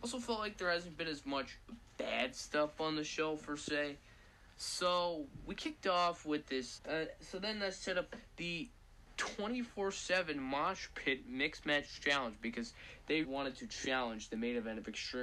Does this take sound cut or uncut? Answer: cut